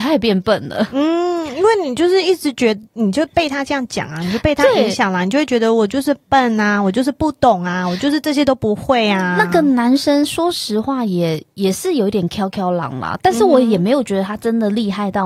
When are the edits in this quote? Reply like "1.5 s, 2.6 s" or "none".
none